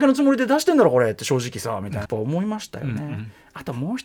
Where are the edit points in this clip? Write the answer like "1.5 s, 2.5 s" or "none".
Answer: 2.0 s